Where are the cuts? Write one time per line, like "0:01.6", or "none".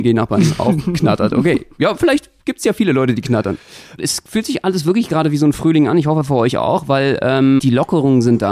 0:04.0
0:07.6